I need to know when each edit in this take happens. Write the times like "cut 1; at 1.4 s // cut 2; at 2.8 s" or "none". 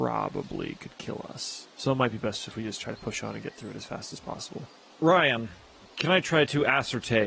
none